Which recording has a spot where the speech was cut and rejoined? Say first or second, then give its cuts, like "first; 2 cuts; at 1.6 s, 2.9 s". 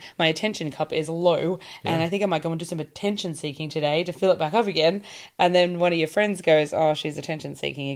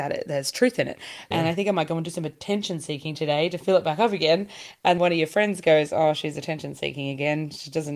second; 2 cuts; at 1.3 s, 5.0 s